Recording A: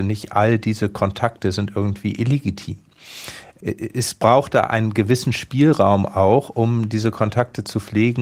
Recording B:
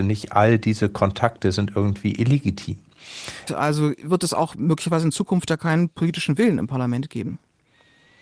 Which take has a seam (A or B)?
B